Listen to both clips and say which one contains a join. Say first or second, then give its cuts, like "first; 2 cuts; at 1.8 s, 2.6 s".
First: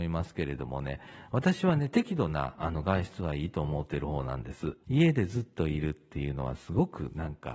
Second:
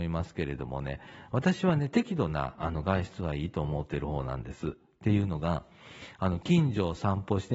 first; 1 cut; at 4.8 s